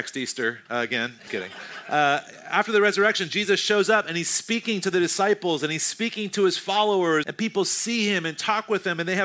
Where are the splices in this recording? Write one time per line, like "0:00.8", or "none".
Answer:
0:01.3
0:07.2